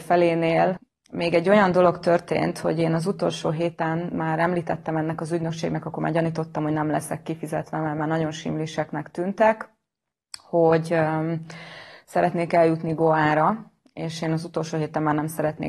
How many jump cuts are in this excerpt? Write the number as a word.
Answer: zero